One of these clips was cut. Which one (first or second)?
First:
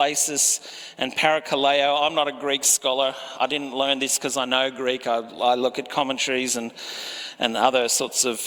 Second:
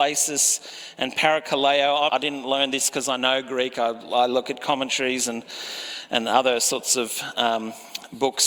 second